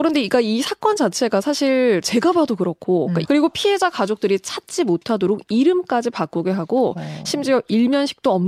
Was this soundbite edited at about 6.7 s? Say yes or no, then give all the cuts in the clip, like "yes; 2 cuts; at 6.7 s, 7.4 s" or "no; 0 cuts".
no; 1 cut; at 3.2 s